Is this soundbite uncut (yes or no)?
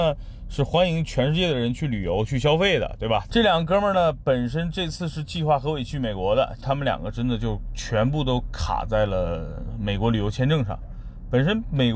no